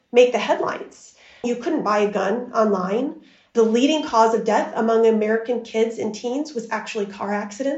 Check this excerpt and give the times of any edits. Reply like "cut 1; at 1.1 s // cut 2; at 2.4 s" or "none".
cut 1; at 1.4 s